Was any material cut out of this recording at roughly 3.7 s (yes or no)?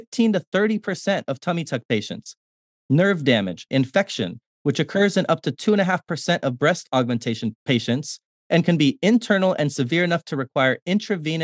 yes